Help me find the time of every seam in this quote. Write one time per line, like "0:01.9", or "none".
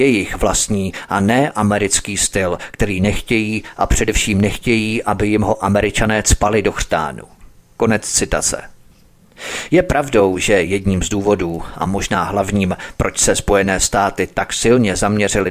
none